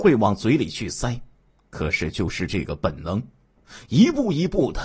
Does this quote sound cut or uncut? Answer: cut